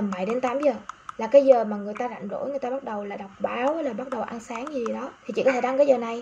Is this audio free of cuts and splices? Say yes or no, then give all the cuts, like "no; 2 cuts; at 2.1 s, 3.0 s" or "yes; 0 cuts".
no; 1 cut; at 5.2 s